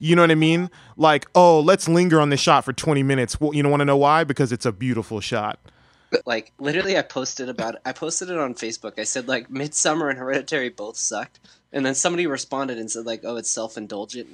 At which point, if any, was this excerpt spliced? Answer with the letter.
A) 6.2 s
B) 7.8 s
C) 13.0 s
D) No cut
A